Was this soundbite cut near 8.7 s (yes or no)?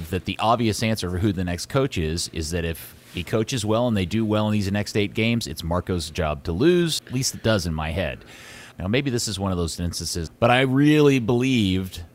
yes